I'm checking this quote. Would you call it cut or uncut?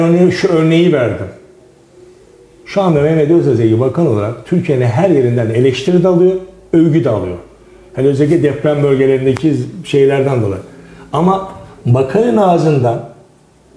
uncut